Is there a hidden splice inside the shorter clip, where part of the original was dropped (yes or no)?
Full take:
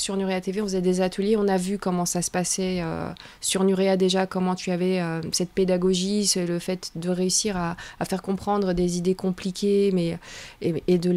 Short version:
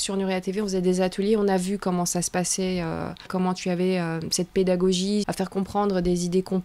yes